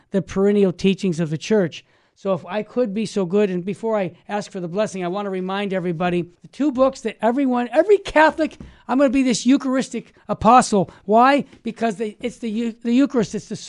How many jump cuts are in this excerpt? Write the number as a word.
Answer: one